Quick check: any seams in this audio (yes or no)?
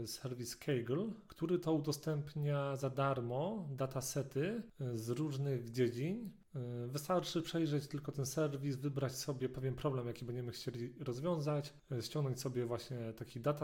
no